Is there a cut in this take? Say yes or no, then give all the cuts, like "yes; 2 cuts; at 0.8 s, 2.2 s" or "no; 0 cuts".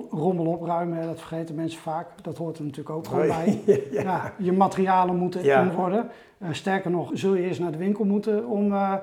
yes; 2 cuts; at 5.7 s, 7.1 s